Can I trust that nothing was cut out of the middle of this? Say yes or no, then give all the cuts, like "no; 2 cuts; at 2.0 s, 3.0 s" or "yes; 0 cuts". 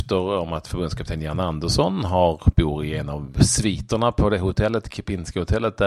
yes; 0 cuts